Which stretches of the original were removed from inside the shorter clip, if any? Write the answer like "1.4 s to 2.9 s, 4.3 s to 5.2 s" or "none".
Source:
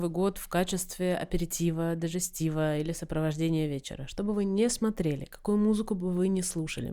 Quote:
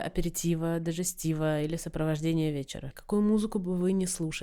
4.1 s to 5.3 s